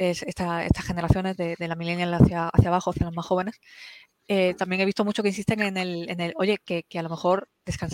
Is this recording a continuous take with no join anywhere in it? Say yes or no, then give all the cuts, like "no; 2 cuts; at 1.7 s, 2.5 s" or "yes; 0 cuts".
yes; 0 cuts